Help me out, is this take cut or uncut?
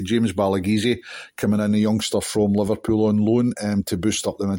uncut